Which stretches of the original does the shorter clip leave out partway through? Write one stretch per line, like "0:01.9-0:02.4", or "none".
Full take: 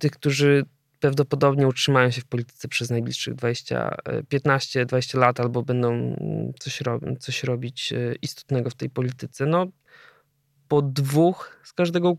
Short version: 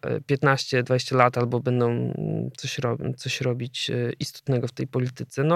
none